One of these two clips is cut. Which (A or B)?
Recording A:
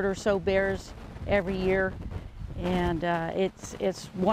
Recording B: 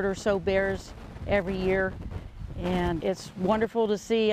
B